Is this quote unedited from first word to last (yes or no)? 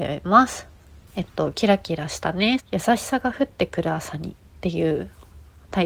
no